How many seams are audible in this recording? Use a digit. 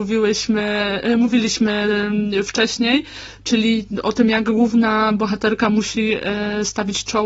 0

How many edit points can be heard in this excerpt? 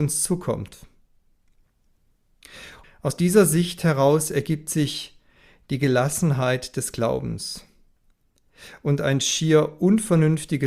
1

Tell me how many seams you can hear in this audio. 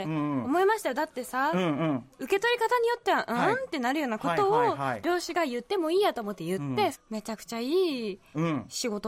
1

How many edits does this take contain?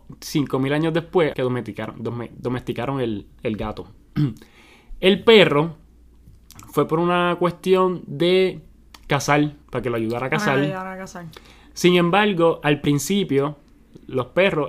2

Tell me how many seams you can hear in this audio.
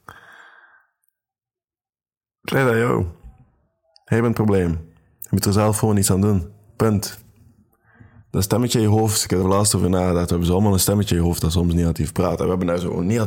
1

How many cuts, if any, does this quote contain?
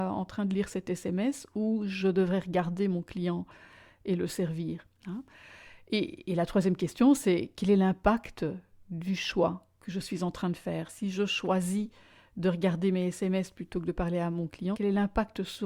1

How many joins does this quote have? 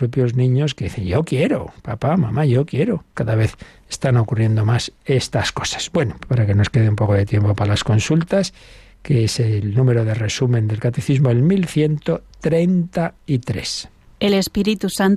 2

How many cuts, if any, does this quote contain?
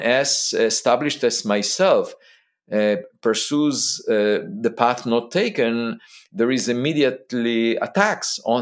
0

